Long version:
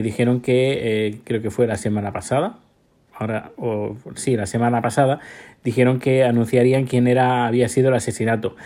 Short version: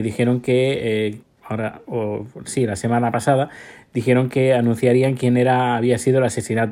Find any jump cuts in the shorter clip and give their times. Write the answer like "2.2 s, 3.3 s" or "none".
1.2 s